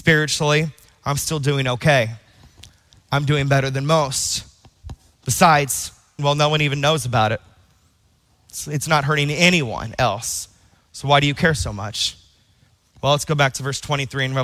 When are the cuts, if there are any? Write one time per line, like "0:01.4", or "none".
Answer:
0:06.2